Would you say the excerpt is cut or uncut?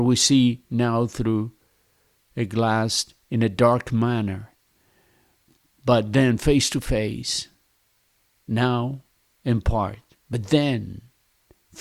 uncut